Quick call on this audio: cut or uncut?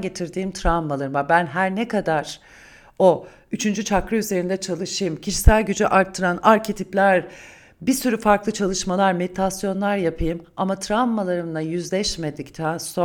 uncut